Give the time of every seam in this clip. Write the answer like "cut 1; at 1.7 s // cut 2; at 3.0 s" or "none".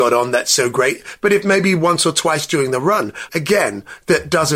cut 1; at 3.3 s